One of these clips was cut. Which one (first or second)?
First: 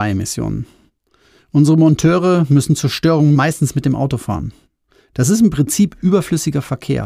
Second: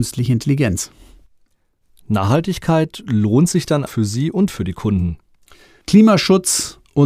second